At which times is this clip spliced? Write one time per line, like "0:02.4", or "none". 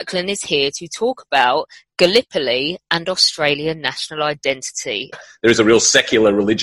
0:05.1